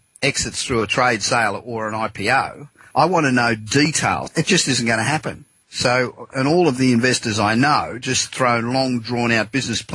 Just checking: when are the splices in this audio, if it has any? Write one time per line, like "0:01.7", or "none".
0:02.9
0:04.3